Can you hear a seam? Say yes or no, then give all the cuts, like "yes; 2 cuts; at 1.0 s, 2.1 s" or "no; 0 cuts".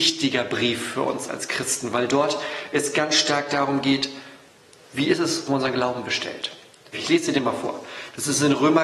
yes; 2 cuts; at 5.5 s, 6.9 s